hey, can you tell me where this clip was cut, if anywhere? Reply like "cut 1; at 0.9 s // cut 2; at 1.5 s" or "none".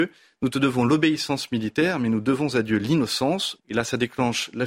cut 1; at 3.6 s